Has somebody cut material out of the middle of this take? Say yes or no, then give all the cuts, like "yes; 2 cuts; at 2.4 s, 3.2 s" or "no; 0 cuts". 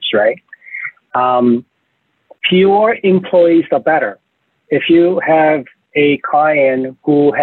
yes; 1 cut; at 2.4 s